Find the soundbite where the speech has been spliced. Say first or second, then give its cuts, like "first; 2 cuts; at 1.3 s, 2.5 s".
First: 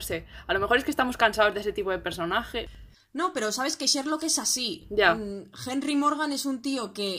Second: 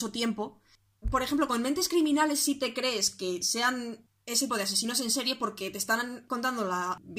second; 2 cuts; at 1.0 s, 4.5 s